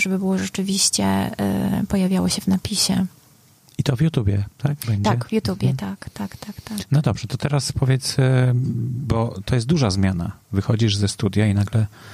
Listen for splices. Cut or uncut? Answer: uncut